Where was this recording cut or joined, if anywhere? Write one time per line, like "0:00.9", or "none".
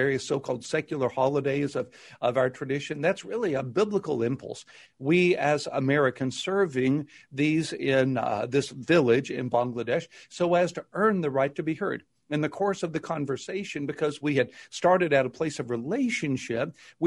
0:04.9